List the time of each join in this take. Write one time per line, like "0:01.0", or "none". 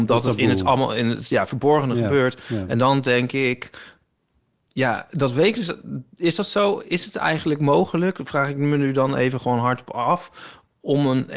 none